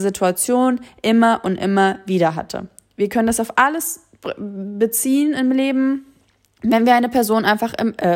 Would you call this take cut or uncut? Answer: uncut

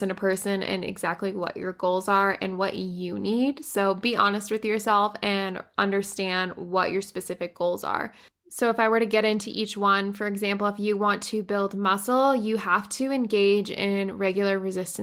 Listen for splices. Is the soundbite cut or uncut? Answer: uncut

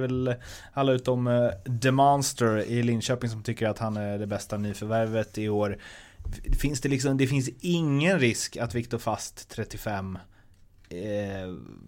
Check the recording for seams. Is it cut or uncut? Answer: uncut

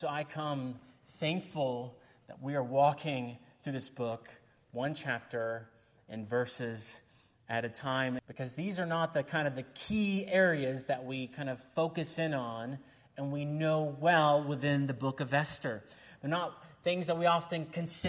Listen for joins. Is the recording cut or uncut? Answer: cut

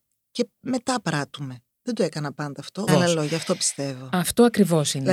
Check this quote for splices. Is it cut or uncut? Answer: cut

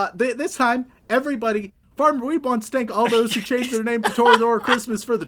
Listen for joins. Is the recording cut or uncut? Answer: cut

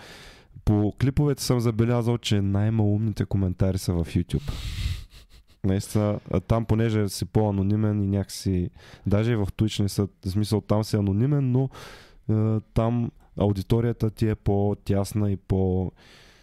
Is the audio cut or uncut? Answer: uncut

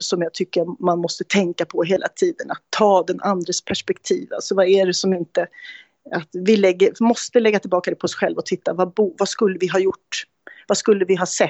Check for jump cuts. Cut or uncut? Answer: uncut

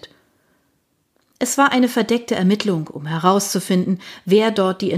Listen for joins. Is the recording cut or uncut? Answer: uncut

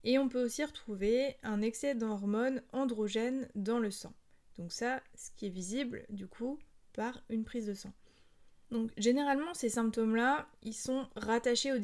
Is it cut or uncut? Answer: uncut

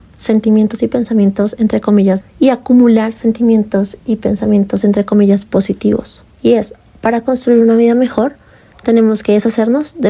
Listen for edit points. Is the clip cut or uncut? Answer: cut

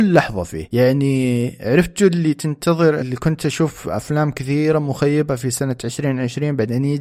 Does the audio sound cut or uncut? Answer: cut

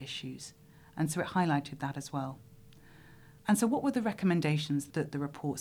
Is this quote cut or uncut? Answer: cut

